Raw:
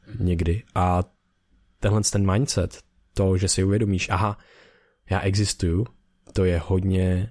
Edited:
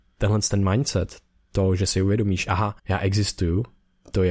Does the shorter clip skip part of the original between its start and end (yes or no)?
yes